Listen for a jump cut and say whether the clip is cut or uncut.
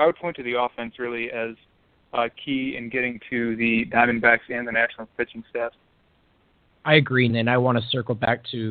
cut